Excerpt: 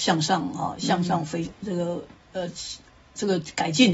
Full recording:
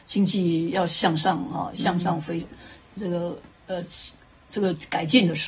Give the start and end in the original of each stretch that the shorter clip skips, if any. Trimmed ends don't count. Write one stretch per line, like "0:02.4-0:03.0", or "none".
0:02.5-0:02.9